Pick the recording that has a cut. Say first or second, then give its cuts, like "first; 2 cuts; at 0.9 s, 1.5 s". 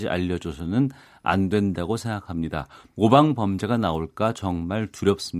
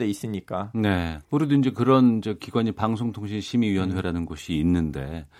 second; 1 cut; at 1.2 s